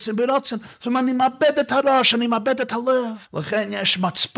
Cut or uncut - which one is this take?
cut